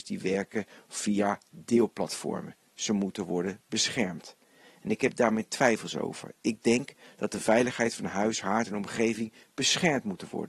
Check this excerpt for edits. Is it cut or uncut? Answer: uncut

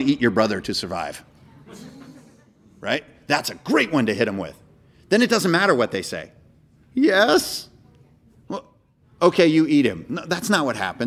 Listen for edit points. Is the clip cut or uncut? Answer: uncut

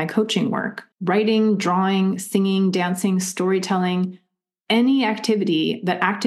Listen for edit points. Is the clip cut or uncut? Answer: cut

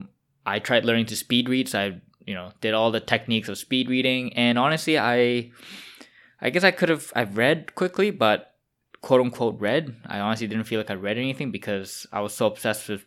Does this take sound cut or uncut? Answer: uncut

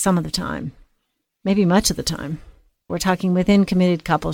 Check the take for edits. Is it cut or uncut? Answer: cut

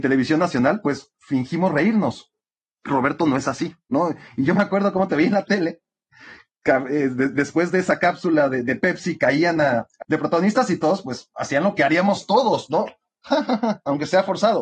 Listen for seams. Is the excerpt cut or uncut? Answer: cut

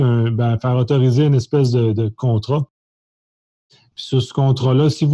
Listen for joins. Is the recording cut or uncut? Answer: uncut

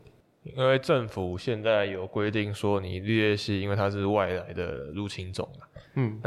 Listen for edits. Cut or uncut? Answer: uncut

